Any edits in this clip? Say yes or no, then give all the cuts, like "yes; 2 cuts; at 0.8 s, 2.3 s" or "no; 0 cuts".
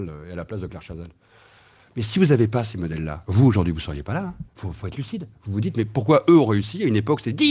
yes; 1 cut; at 4.5 s